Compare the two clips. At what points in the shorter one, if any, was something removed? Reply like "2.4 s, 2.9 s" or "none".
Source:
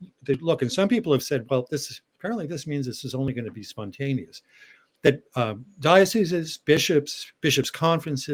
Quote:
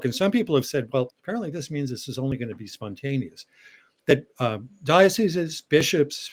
1.1 s